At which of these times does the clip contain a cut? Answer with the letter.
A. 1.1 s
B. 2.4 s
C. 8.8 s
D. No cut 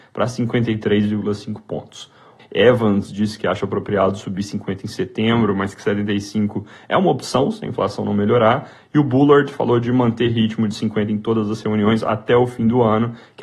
B